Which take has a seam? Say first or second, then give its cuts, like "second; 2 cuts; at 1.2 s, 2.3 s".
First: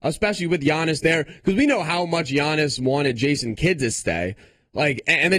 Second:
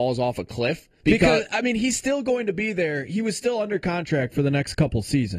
second; 1 cut; at 1.0 s